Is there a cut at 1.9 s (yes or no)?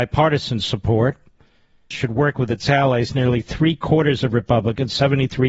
yes